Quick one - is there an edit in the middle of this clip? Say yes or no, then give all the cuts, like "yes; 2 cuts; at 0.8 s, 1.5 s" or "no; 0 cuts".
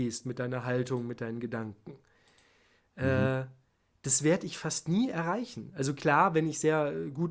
no; 0 cuts